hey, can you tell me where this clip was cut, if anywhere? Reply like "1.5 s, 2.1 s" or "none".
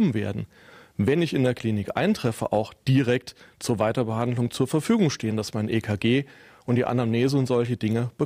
none